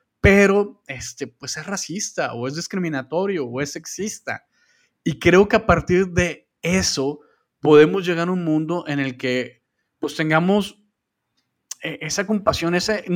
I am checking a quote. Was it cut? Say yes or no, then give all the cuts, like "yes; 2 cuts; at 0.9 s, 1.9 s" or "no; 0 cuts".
no; 0 cuts